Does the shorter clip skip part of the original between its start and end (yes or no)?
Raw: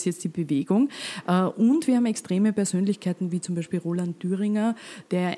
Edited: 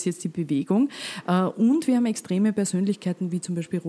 no